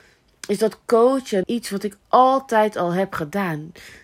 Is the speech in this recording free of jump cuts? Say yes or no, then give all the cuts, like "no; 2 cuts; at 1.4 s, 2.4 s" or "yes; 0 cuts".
no; 1 cut; at 1.4 s